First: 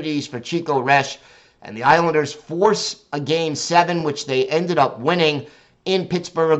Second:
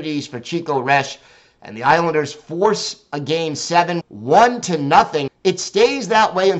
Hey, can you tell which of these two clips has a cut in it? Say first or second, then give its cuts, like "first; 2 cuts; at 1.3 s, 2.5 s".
second; 2 cuts; at 4.0 s, 5.3 s